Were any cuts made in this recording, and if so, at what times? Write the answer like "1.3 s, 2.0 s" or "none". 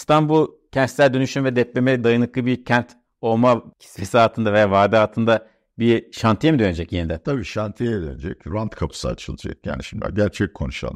none